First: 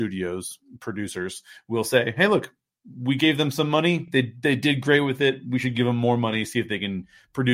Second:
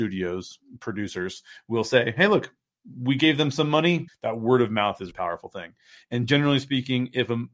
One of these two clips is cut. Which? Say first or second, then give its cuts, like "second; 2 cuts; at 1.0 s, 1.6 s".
second; 2 cuts; at 4.1 s, 5.1 s